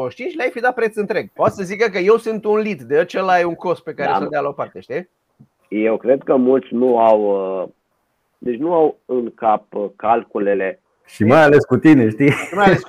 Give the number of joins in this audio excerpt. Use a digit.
2